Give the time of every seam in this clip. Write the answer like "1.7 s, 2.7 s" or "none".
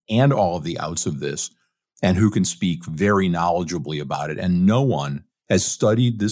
5.3 s